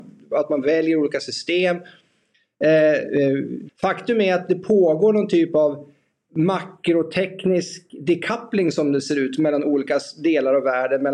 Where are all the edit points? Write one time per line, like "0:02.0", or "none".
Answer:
0:03.7